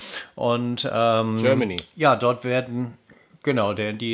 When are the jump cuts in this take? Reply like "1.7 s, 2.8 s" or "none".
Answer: none